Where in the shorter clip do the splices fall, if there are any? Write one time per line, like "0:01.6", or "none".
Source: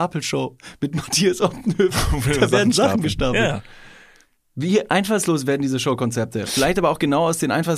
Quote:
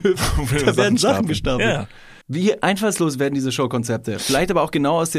0:02.2